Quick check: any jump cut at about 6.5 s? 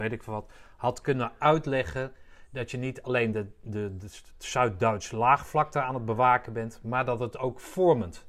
no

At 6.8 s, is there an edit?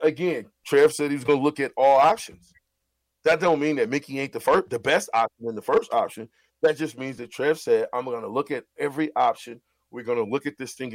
no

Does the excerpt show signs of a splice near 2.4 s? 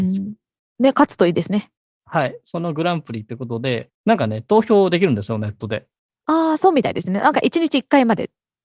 no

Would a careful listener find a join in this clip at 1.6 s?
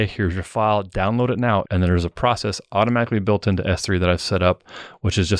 yes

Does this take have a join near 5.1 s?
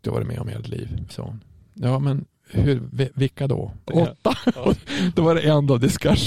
no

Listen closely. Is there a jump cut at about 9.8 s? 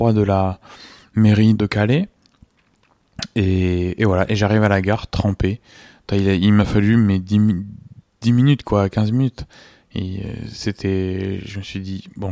no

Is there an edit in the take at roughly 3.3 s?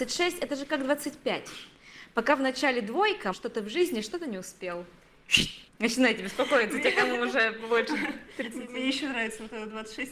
yes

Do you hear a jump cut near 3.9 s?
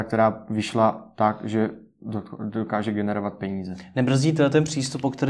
no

